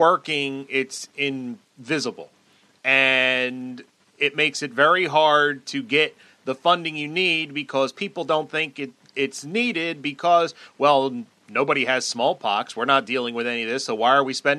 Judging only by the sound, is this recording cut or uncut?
uncut